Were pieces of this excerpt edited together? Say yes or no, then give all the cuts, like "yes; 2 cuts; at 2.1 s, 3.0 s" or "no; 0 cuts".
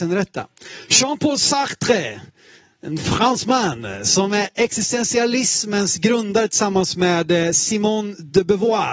no; 0 cuts